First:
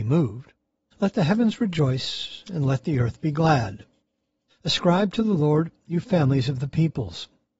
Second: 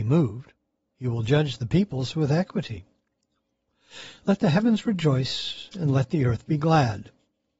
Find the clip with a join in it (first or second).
first